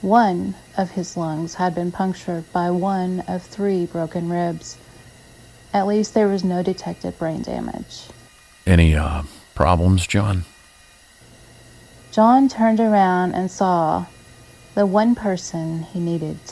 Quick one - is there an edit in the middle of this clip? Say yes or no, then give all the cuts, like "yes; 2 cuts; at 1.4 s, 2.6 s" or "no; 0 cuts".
no; 0 cuts